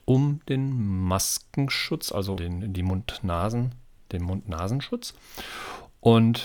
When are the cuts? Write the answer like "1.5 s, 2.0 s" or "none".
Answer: 2.4 s